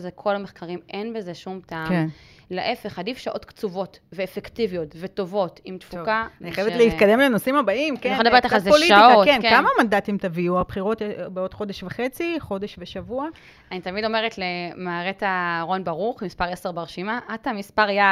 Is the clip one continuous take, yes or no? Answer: yes